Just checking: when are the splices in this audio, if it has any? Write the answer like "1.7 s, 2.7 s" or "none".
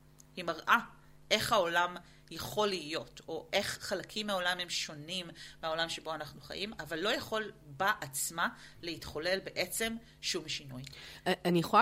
none